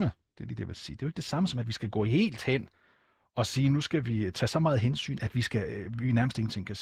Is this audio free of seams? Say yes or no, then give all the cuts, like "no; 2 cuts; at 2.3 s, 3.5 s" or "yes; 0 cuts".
yes; 0 cuts